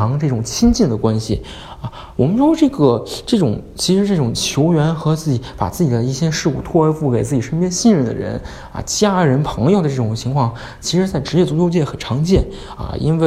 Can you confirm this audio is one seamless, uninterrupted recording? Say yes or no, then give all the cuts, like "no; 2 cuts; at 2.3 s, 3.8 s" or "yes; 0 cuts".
yes; 0 cuts